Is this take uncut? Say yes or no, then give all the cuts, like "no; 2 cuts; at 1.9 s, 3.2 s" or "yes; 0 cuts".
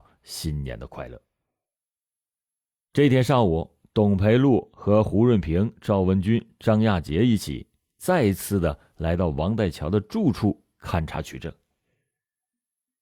yes; 0 cuts